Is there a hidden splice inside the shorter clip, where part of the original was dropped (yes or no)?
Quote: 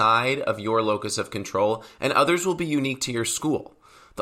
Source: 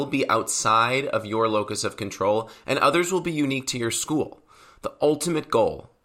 no